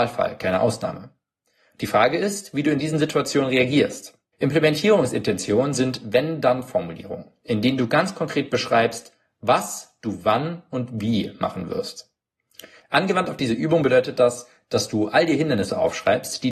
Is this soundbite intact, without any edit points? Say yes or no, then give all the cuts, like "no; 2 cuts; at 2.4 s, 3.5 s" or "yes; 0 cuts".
no; 1 cut; at 4.3 s